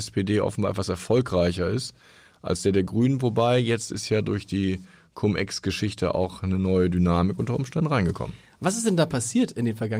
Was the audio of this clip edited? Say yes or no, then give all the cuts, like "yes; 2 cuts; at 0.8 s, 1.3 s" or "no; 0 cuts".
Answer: no; 0 cuts